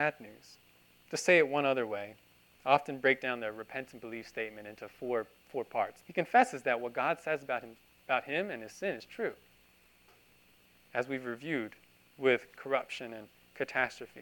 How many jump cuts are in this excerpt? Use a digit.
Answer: 1